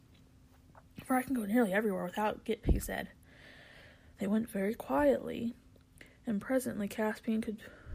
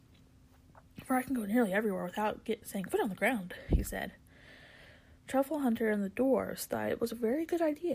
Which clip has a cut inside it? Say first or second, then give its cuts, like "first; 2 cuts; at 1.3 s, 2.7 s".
first; 2 cuts; at 2.6 s, 4.1 s